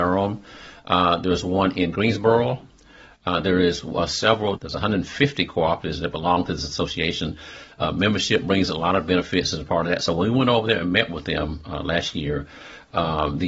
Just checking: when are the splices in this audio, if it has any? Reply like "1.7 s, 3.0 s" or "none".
4.6 s